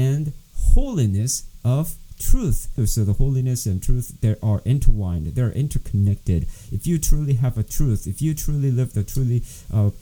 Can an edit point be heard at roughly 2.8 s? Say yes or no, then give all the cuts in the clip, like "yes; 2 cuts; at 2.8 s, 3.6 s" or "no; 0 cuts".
yes; 1 cut; at 2.8 s